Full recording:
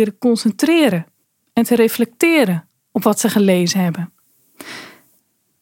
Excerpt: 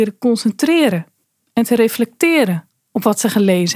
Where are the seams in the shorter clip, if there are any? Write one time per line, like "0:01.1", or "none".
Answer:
none